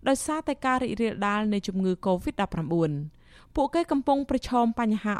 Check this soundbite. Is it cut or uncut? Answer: uncut